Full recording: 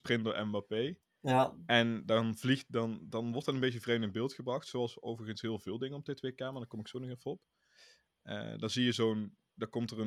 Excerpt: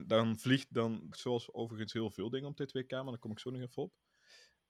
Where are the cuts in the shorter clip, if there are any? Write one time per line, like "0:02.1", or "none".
0:01.1